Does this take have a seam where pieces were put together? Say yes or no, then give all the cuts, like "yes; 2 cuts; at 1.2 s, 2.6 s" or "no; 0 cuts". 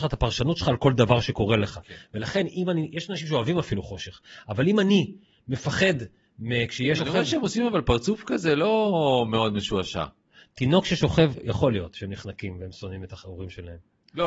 yes; 1 cut; at 7.0 s